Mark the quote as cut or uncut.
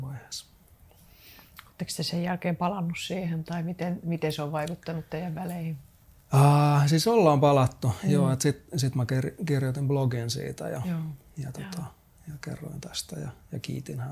uncut